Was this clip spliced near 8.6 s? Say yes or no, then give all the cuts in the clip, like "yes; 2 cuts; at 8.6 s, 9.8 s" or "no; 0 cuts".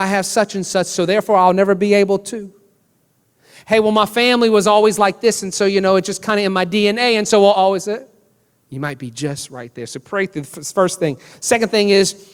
yes; 1 cut; at 8.6 s